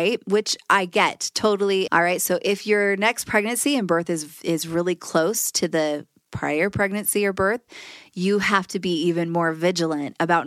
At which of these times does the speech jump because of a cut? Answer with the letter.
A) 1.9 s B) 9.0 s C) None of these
A